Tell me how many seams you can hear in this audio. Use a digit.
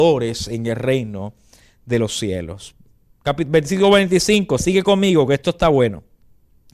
1